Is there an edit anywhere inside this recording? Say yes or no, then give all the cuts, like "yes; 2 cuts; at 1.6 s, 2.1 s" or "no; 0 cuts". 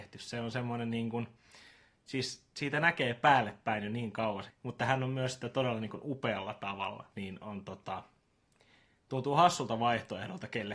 yes; 2 cuts; at 4.5 s, 7.1 s